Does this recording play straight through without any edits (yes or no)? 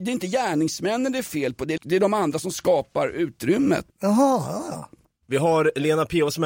no